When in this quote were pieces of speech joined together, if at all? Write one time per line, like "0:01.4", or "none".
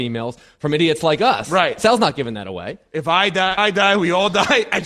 0:03.6